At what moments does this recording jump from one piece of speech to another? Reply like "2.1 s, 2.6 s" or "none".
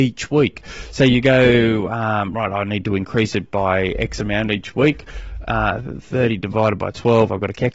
none